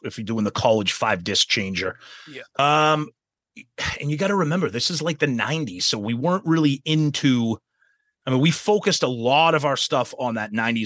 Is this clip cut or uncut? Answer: uncut